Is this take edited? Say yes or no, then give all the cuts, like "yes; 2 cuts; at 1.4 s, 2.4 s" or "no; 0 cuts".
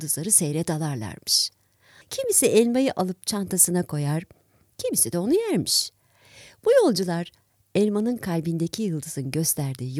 yes; 1 cut; at 2.0 s